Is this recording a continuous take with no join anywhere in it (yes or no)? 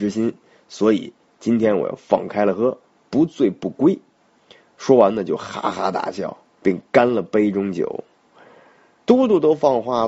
yes